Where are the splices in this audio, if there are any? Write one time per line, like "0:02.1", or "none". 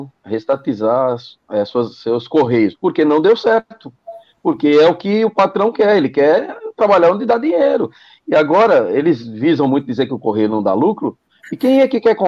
none

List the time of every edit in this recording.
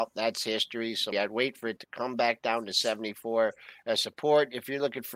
0:01.1

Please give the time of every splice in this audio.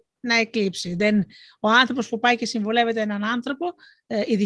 none

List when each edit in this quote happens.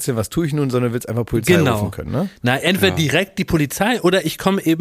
none

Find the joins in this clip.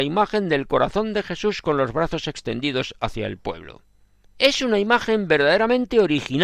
0:04.2

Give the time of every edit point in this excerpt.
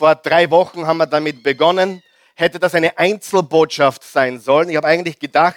none

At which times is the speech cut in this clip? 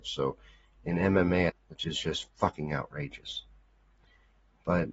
0:01.5

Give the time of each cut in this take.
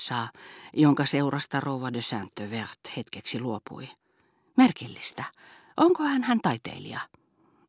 none

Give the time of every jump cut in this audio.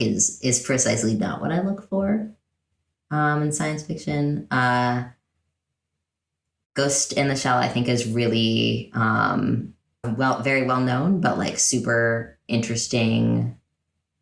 0:10.0

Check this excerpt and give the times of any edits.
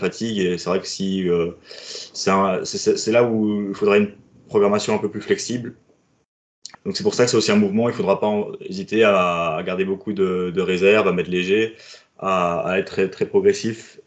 0:06.7

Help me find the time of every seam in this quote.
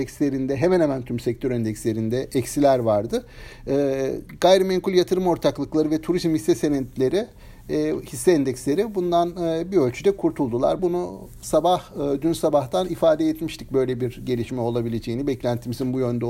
0:10.8

